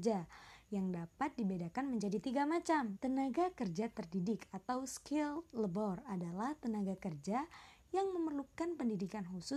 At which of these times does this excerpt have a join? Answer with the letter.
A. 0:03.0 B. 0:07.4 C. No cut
A